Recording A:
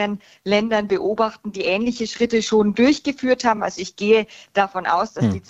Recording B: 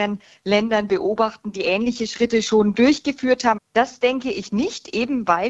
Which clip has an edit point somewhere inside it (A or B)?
B